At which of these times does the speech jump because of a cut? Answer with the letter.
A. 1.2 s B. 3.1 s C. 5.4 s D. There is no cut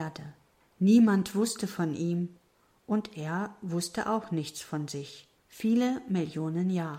C